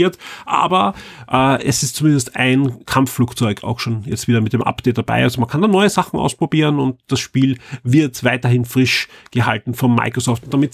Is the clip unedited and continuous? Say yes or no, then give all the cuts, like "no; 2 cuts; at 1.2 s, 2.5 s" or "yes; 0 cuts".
yes; 0 cuts